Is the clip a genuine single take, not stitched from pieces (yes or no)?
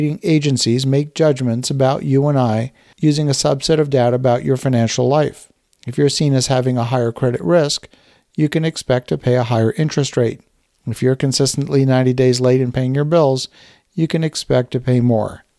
yes